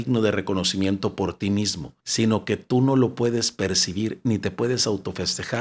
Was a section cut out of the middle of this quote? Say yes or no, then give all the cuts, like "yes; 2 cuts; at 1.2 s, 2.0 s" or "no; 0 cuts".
yes; 1 cut; at 2.0 s